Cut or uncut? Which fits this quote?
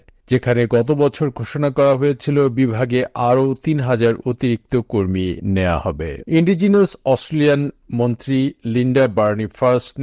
cut